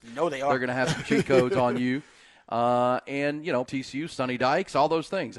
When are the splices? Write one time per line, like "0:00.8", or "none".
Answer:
0:03.7